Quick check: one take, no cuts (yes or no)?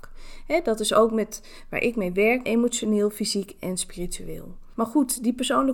no